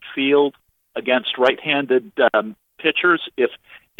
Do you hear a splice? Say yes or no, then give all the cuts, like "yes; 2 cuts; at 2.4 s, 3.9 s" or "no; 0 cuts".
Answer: no; 0 cuts